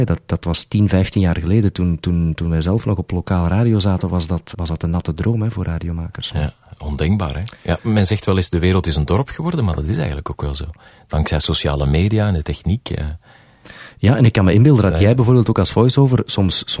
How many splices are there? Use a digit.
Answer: 1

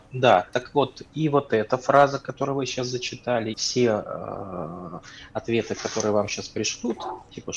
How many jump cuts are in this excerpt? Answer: 1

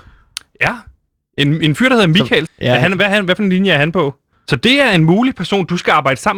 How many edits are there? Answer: 2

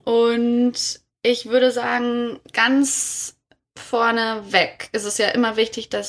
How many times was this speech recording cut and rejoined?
0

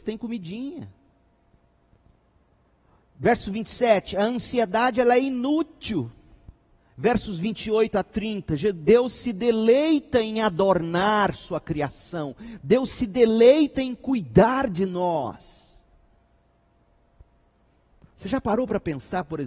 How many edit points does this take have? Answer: 1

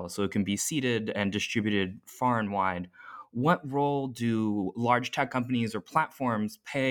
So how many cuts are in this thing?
0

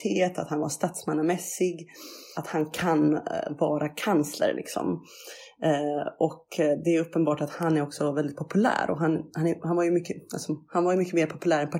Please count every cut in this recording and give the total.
1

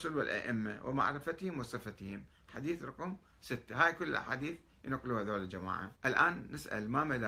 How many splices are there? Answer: 1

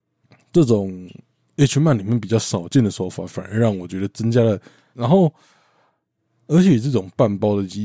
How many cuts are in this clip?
1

